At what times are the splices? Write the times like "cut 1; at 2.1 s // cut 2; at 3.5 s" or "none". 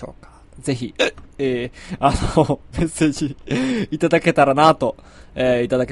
none